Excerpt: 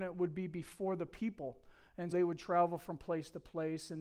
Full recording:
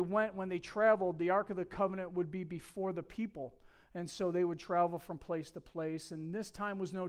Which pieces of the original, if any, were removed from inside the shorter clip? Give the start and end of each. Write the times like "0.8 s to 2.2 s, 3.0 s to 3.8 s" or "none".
4.1 s to 4.3 s